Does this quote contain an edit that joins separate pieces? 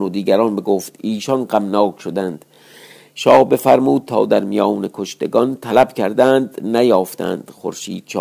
no; 0 cuts

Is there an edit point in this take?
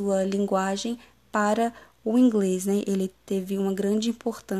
no; 0 cuts

